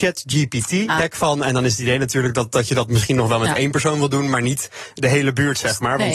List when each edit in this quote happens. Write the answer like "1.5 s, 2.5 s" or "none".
1.0 s